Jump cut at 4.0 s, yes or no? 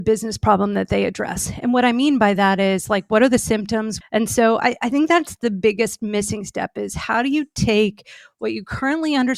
yes